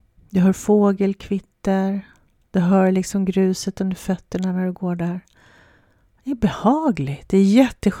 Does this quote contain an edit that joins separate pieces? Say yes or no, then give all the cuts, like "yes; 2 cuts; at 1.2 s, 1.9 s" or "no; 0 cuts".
no; 0 cuts